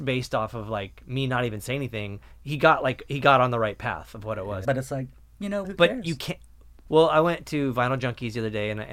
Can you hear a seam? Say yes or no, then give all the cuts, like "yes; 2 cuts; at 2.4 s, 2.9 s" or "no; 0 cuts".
yes; 3 cuts; at 4.6 s, 5.6 s, 6.9 s